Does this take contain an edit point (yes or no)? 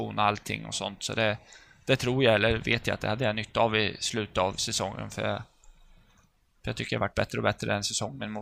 no